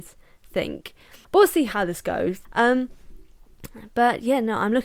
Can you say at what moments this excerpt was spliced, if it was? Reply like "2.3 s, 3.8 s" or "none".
1.2 s, 2.4 s